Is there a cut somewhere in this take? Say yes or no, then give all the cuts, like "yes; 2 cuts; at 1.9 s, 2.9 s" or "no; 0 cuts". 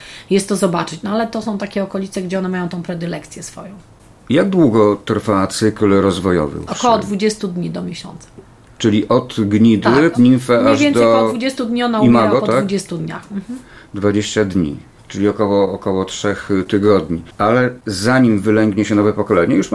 yes; 1 cut; at 10.1 s